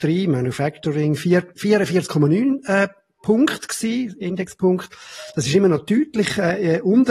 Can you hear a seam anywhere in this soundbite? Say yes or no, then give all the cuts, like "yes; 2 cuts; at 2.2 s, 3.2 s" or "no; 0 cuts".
no; 0 cuts